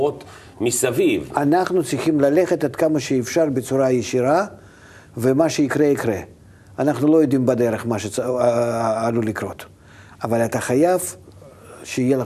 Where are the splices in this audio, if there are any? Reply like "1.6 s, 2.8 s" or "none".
none